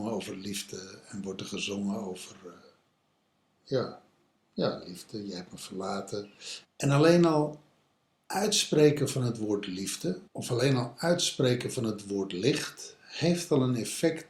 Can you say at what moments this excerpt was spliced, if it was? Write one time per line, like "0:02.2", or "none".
0:06.6
0:10.3